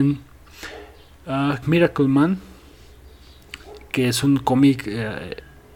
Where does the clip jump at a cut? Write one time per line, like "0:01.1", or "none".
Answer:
0:01.6